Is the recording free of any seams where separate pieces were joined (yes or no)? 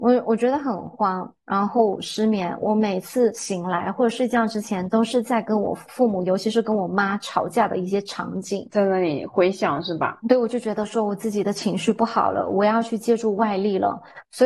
yes